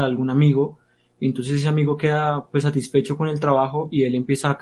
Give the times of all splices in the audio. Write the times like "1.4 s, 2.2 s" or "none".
none